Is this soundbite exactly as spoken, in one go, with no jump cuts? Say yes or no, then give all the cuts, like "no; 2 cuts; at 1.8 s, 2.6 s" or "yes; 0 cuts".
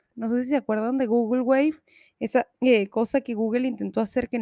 no; 1 cut; at 2.5 s